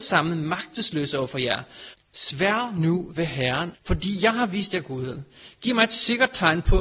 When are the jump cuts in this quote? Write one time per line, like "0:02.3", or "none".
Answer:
0:01.9
0:03.7